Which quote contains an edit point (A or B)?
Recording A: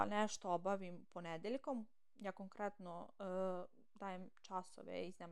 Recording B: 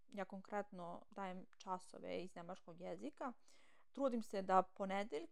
B